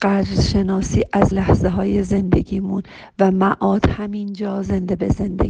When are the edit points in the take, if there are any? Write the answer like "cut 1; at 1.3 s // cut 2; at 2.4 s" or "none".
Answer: cut 1; at 1.3 s